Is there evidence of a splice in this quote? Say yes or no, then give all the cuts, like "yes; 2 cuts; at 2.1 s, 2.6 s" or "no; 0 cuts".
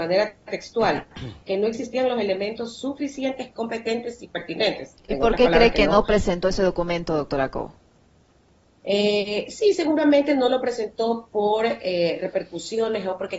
no; 0 cuts